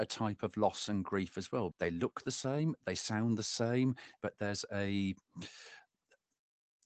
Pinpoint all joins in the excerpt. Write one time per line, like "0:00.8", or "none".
0:01.7
0:04.2